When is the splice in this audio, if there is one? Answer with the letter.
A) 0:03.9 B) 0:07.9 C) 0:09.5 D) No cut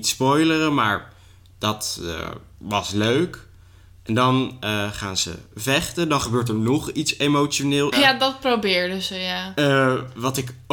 B